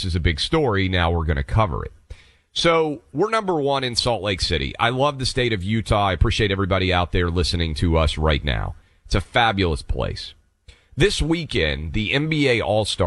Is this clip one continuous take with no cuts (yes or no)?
yes